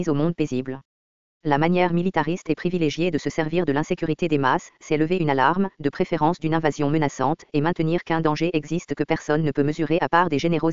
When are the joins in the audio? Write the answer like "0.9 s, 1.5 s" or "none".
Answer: none